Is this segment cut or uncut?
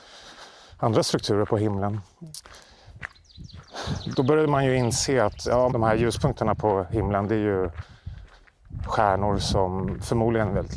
cut